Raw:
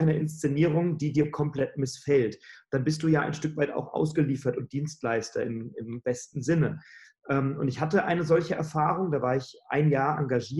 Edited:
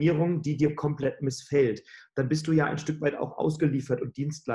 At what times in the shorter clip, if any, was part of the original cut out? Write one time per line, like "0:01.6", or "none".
none

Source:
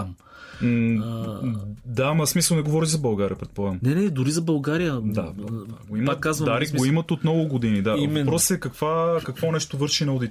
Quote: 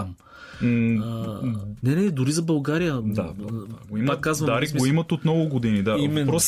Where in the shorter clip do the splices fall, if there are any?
0:01.8

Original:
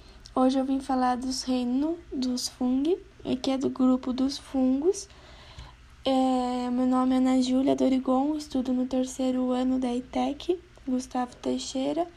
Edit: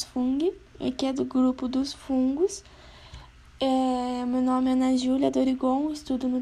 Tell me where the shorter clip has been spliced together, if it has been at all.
none

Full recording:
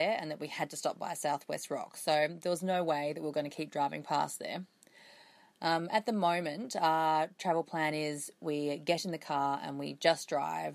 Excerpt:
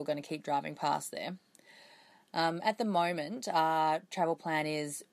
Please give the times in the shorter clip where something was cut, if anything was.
none

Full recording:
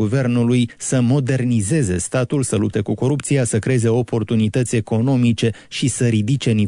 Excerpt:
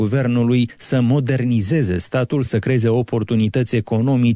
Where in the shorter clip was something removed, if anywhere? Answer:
0:02.5

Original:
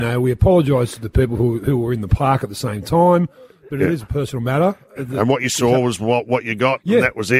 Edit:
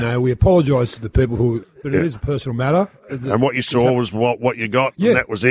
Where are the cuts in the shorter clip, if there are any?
0:01.6

